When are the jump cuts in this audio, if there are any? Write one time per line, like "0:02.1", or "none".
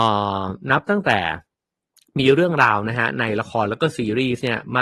none